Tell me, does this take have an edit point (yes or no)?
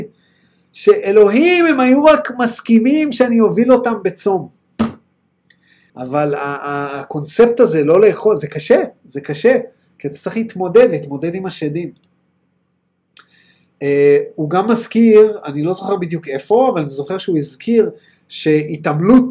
yes